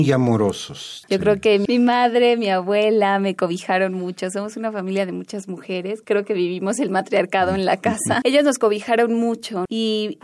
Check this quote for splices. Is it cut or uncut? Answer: cut